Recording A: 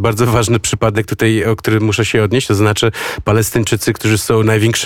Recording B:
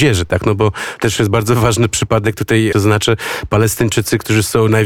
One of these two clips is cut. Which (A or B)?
B